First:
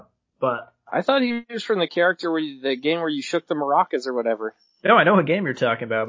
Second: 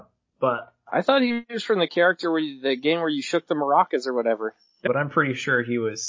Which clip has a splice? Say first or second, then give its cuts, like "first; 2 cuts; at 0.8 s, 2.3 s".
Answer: second; 1 cut; at 4.9 s